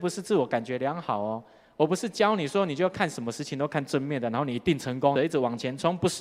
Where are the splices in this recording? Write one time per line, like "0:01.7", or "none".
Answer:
0:05.2